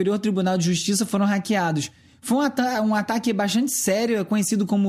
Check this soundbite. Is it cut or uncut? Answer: uncut